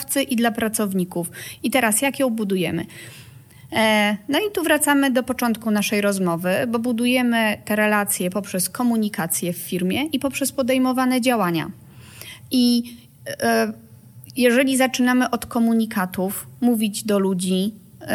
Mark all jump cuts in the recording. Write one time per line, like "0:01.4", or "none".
0:01.6

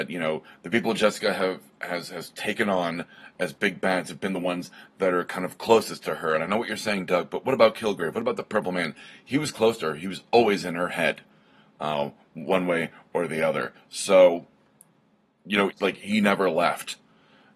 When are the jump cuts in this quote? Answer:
0:15.7

